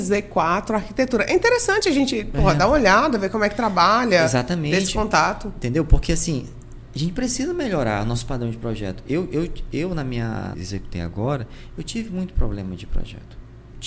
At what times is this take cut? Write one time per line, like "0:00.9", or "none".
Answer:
0:10.5